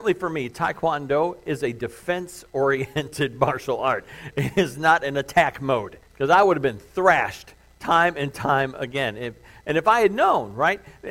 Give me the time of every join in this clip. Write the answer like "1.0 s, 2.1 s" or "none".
6.1 s